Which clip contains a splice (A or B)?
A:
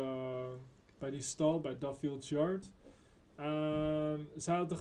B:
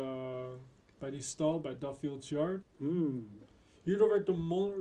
B